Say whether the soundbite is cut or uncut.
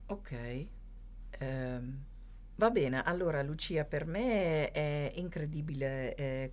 uncut